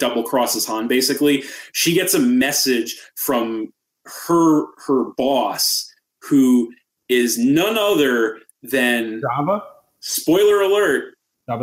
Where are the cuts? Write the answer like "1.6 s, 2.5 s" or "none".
none